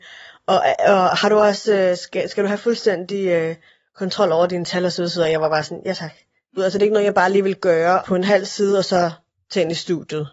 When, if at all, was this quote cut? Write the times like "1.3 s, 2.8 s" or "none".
6.6 s, 8.0 s